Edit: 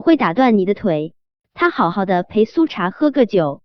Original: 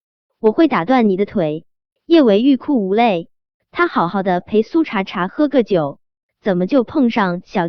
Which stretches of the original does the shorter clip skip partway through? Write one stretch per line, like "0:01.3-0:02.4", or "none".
0:02.0-0:03.6
0:04.8-0:05.0